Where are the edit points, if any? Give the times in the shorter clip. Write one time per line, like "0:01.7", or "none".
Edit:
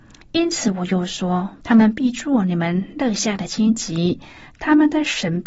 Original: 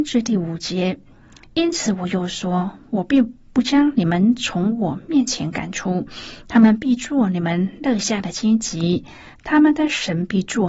0:01.6